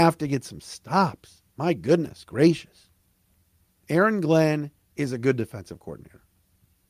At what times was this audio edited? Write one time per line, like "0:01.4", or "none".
0:01.5